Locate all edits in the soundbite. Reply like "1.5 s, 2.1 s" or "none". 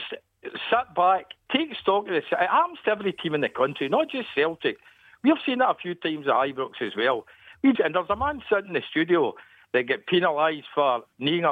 7.8 s